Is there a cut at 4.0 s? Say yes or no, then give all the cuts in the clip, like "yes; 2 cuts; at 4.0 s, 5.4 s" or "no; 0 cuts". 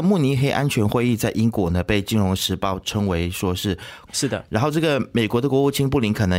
yes; 1 cut; at 4.0 s